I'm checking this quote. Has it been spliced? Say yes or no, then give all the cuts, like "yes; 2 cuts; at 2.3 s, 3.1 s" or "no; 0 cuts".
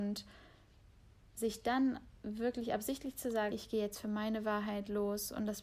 yes; 1 cut; at 3.5 s